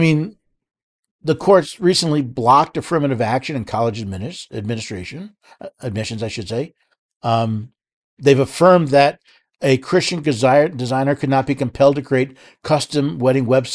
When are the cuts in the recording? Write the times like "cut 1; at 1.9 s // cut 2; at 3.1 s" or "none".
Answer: none

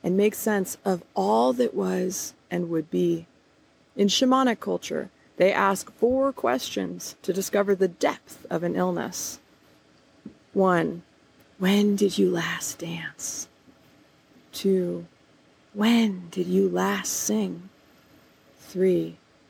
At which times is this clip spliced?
none

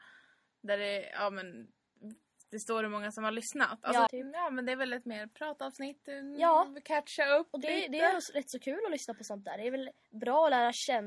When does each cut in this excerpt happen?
cut 1; at 4.1 s

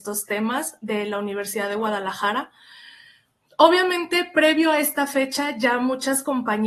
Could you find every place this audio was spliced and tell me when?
none

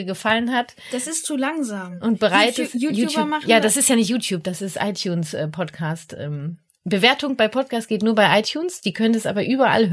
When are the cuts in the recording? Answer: none

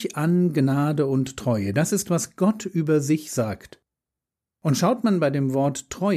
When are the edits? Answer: none

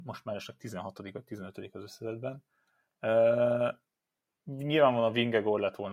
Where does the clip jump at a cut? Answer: none

